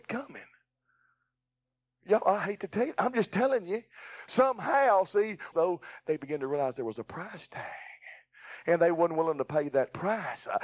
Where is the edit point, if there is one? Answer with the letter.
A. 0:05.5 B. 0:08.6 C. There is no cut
A